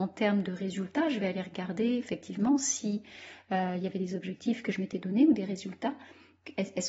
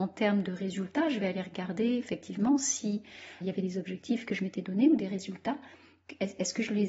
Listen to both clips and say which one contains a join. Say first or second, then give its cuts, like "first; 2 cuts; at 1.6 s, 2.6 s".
second; 1 cut; at 3.4 s